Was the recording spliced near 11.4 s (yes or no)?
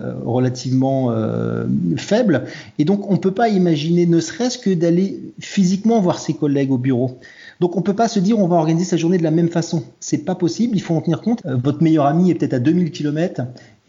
yes